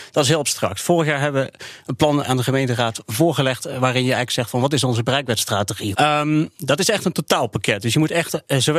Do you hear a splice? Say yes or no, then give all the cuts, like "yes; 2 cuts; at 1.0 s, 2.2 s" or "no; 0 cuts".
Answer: yes; 2 cuts; at 2.2 s, 5.9 s